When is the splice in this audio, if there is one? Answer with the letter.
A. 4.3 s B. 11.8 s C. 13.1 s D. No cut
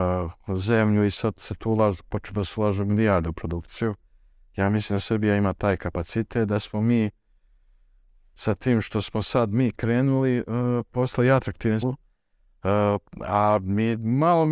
B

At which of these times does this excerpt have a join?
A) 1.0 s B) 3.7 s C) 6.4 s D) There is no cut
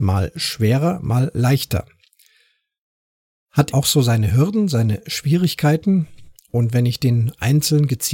B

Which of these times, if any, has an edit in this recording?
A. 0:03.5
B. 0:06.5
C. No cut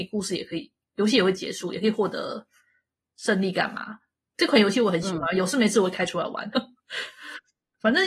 B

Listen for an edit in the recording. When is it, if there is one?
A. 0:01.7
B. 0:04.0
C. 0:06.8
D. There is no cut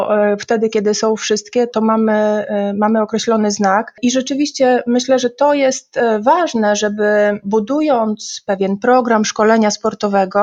A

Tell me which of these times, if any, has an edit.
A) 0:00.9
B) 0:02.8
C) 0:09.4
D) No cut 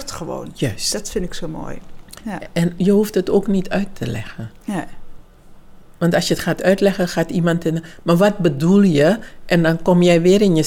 B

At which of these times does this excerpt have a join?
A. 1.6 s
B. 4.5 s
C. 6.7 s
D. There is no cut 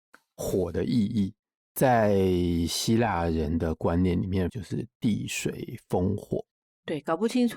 B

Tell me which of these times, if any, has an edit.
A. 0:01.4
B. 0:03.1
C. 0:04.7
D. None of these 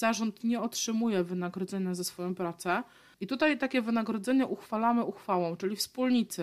B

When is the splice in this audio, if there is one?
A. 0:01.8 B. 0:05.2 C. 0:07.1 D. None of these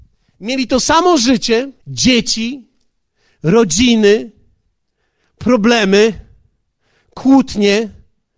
A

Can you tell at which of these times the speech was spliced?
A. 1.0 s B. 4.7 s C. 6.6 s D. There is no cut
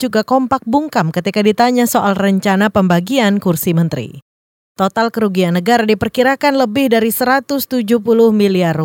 B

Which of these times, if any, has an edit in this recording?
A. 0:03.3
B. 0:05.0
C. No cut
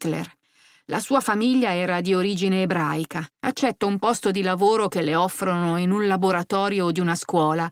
A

